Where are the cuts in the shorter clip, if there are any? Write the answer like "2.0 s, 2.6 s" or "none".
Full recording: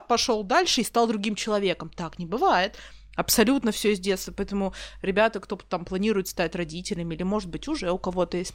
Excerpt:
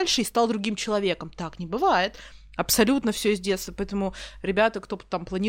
none